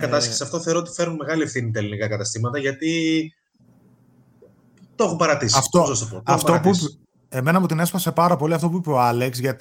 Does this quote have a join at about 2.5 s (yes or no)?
no